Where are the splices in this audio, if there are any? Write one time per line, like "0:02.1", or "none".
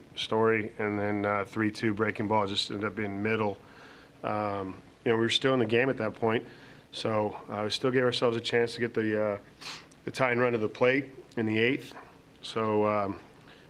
none